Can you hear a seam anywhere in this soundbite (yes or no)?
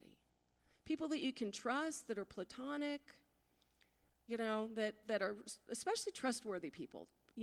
no